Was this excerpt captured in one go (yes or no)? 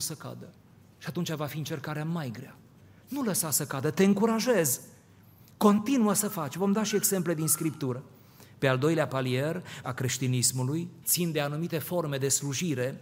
no